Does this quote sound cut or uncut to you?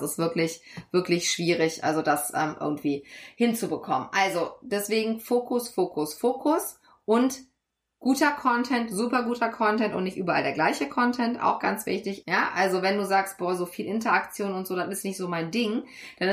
cut